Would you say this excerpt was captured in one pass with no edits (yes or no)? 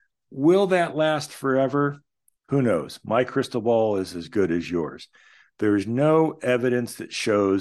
yes